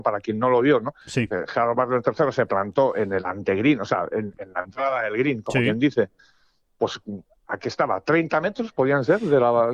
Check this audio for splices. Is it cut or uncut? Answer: uncut